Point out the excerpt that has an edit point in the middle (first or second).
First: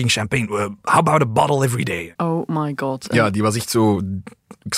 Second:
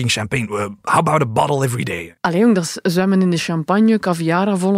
first